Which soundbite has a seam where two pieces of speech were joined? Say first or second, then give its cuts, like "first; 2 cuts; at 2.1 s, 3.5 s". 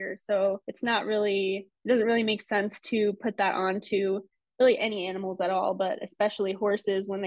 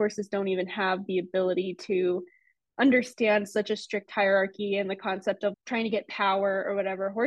second; 1 cut; at 5.5 s